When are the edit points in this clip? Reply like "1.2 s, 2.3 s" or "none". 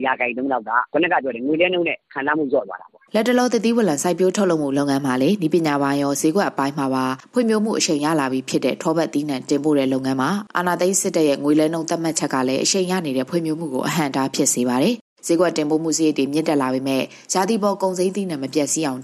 3.1 s